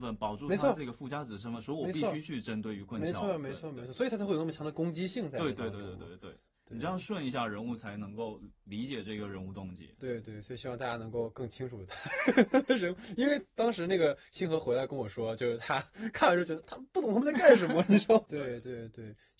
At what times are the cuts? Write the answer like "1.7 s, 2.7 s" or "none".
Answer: 18.3 s